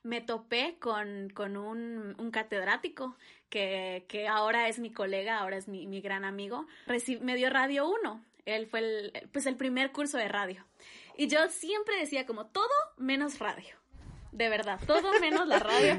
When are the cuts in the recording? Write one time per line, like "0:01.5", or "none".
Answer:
0:06.9

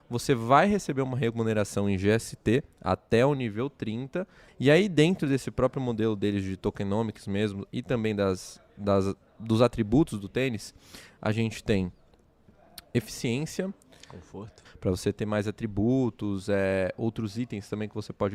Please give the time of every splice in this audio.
0:04.5
0:14.7

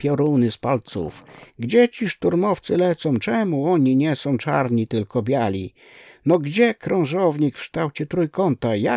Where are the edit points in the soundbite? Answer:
none

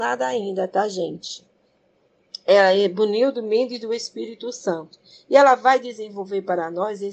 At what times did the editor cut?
none

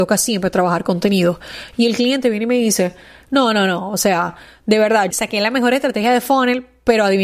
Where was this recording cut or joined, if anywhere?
0:05.1

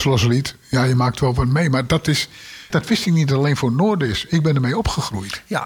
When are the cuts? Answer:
0:02.7

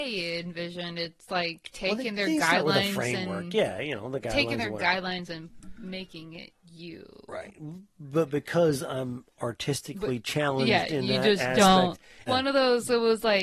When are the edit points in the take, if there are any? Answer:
0:12.3

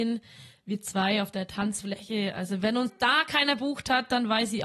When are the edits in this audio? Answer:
none

